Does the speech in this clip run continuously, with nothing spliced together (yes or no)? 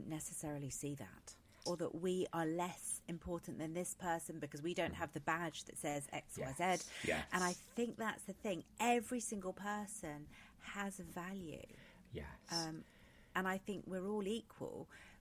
no